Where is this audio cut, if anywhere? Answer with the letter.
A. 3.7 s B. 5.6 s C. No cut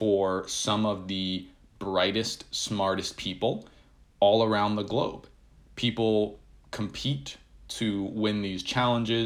C